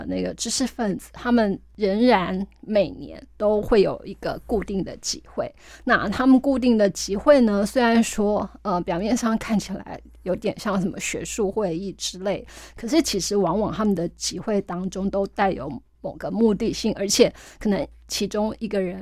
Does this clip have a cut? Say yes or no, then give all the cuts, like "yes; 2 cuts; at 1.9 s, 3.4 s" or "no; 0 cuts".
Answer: no; 0 cuts